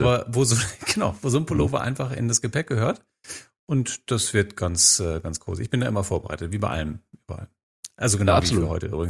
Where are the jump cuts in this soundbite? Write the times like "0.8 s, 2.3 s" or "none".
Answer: none